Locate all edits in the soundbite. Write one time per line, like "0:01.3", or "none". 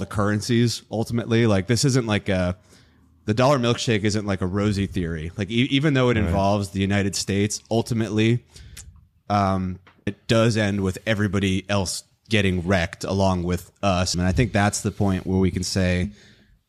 0:10.1
0:14.1